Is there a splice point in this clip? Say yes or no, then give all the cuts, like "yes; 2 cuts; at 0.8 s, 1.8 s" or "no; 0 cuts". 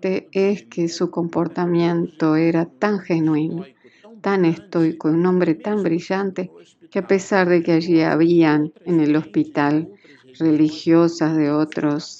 no; 0 cuts